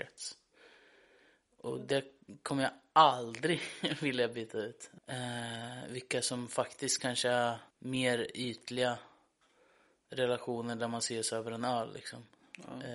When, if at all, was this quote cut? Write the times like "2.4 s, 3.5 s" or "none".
5.0 s, 7.7 s